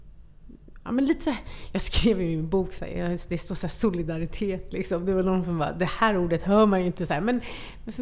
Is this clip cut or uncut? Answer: uncut